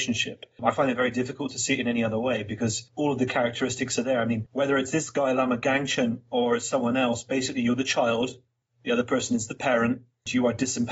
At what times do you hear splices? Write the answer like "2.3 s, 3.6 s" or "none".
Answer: none